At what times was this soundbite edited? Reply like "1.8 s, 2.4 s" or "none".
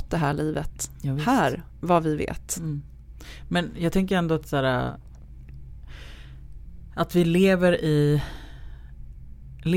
none